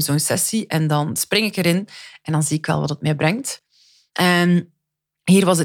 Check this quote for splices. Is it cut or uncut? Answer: uncut